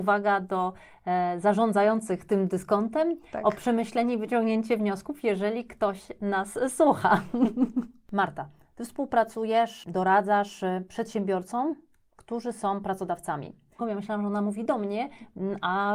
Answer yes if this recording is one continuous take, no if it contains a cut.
no